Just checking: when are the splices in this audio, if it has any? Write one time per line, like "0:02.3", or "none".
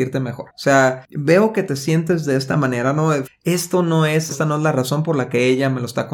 0:03.2
0:04.3

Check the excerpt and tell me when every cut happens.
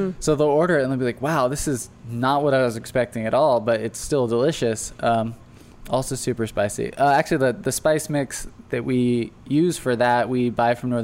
none

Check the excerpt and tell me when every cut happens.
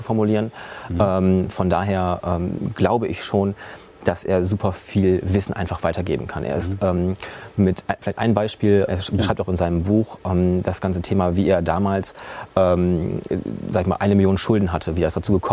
0:08.9

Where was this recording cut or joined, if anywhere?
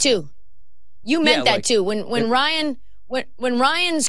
none

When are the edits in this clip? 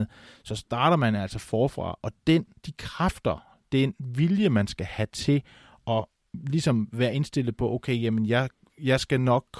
none

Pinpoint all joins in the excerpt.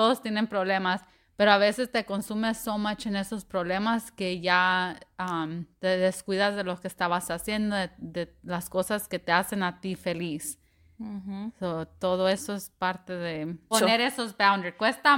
0:13.7

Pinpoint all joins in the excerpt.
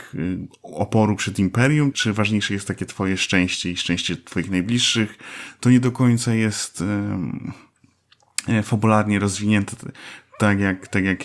0:01.9

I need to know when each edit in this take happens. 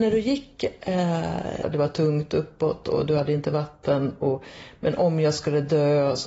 0:01.6

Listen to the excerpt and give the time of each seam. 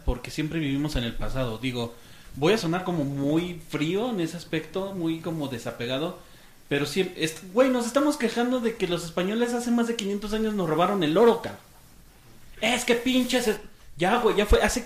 none

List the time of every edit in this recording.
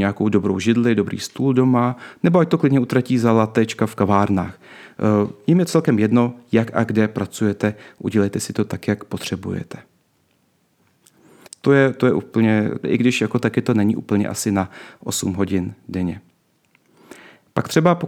0:11.5
0:12.8

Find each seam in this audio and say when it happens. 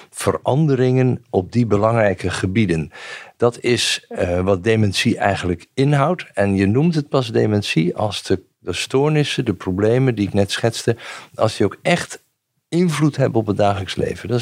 none

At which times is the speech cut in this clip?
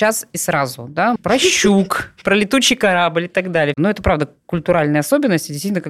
0:01.2
0:03.7

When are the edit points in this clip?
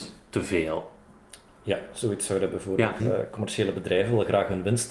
0:03.0

